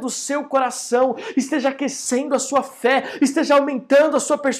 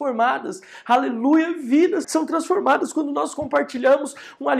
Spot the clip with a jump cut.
second; 1 cut; at 2.0 s

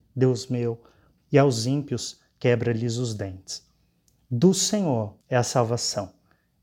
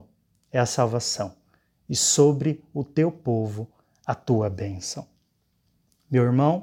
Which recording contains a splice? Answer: first; 2 cuts; at 1.2 s, 5.2 s

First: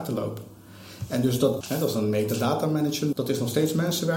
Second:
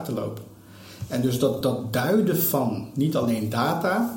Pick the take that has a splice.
first; 2 cuts; at 1.6 s, 3.1 s

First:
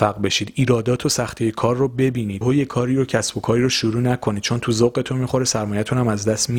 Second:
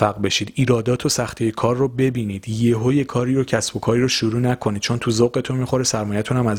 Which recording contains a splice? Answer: first; 1 cut; at 2.4 s

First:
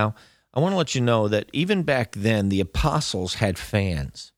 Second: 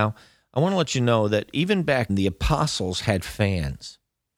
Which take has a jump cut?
second; 1 cut; at 2.1 s

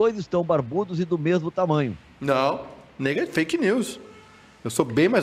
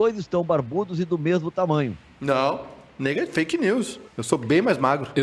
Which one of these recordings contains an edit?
second; 1 cut; at 4.1 s

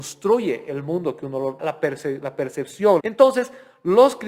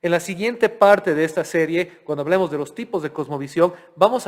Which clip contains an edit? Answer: first; 2 cuts; at 1.6 s, 3.0 s

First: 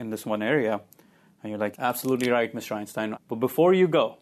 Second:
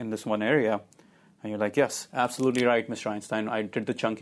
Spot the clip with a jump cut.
first; 2 cuts; at 1.7 s, 3.1 s

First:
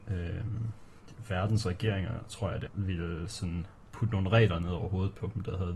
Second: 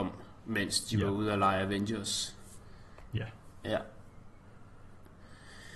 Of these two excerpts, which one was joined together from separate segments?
first; 1 cut; at 2.7 s

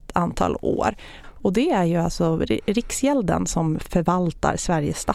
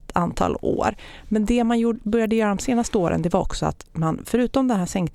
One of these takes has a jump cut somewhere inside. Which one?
first; 1 cut; at 1.2 s

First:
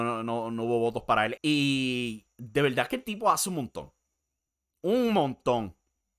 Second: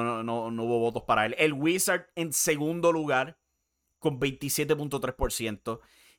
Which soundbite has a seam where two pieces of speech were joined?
first; 1 cut; at 1.4 s

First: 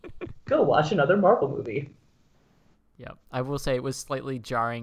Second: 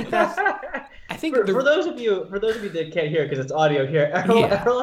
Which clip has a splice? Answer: first; 1 cut; at 3.2 s

